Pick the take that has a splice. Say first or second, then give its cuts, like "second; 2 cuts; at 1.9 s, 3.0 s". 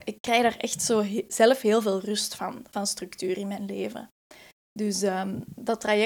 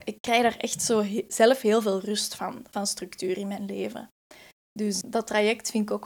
second; 1 cut; at 5.0 s